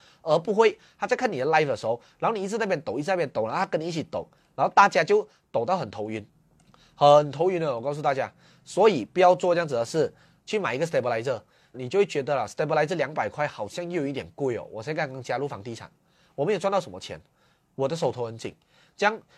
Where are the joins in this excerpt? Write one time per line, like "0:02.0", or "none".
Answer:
0:11.7